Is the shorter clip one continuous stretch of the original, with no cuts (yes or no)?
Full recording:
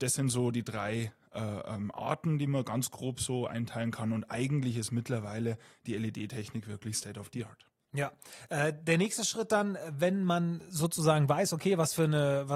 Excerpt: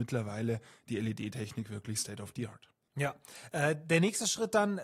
yes